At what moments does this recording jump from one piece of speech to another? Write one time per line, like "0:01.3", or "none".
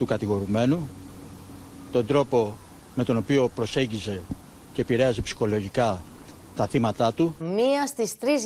0:07.4